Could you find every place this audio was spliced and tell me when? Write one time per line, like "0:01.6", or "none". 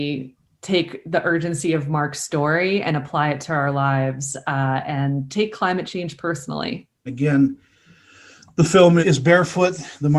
0:07.1
0:09.0